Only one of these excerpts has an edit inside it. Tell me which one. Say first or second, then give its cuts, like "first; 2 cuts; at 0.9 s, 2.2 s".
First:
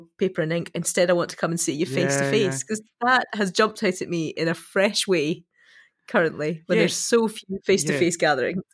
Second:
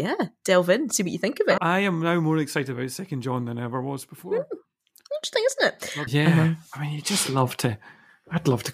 second; 2 cuts; at 1.6 s, 6.1 s